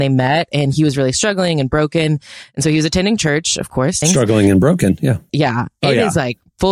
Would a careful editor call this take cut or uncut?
cut